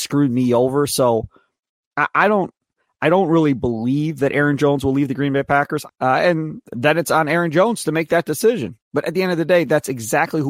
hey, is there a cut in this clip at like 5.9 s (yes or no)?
yes